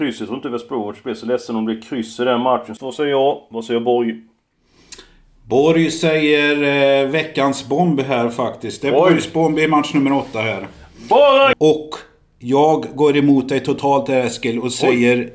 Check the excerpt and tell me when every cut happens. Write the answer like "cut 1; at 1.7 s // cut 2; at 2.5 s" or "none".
cut 1; at 2.8 s // cut 2; at 11.5 s

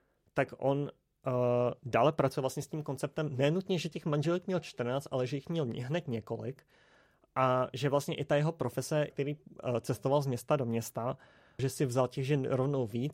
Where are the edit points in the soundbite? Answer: cut 1; at 9.1 s // cut 2; at 11.6 s

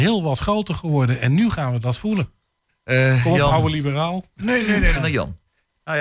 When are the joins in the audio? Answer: cut 1; at 2.7 s // cut 2; at 4.9 s

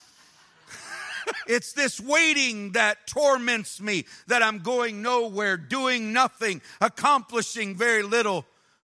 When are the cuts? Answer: cut 1; at 1.4 s

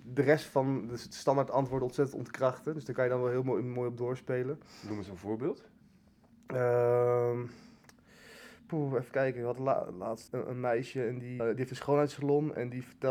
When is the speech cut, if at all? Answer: cut 1; at 10.3 s // cut 2; at 11.4 s

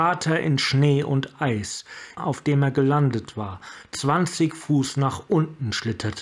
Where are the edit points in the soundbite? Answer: cut 1; at 2.2 s

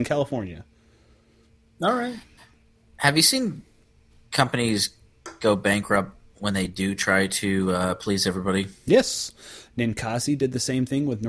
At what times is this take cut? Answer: cut 1; at 9.7 s

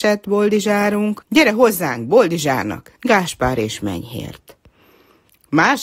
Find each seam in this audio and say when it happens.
cut 1; at 1.2 s // cut 2; at 3.0 s

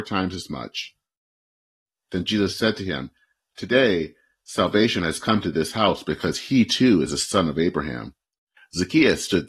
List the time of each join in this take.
cut 1; at 8.6 s

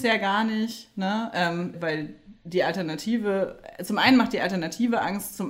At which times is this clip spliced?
cut 1; at 1.7 s

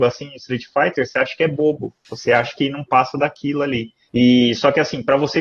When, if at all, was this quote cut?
cut 1; at 4.1 s

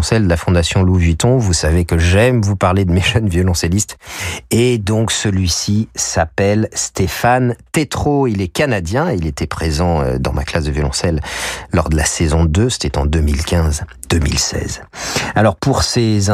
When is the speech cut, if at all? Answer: none

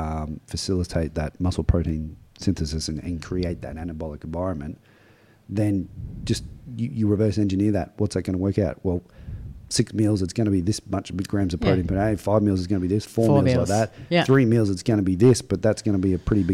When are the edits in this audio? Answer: none

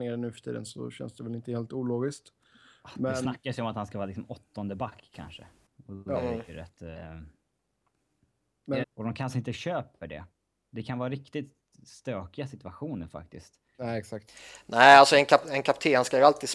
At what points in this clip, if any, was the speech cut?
cut 1; at 8.8 s // cut 2; at 13.7 s

